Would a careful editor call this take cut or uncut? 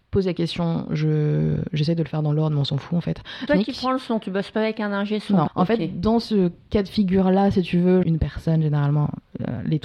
cut